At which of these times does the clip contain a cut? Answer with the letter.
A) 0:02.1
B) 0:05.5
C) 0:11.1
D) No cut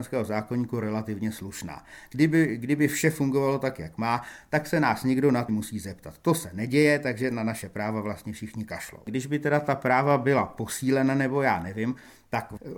B